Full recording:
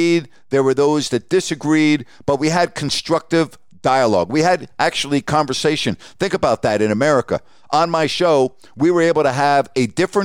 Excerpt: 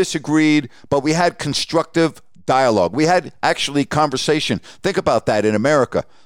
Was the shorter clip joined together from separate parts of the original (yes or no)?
no